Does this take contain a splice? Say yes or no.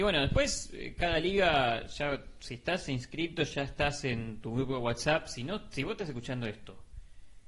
no